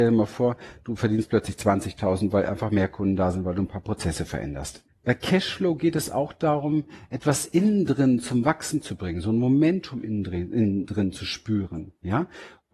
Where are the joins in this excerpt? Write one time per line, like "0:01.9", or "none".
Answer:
0:04.9